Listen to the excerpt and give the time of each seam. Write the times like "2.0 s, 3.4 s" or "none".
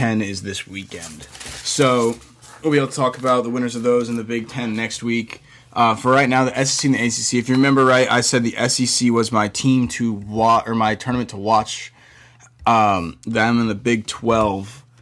none